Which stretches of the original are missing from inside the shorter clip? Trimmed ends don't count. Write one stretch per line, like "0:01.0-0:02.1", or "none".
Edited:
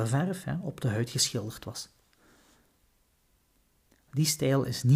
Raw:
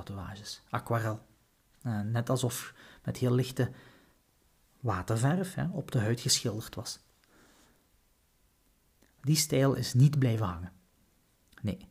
none